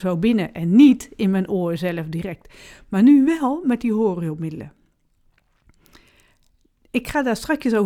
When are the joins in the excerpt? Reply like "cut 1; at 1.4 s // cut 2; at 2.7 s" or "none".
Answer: none